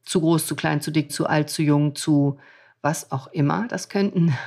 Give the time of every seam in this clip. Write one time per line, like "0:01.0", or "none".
0:01.1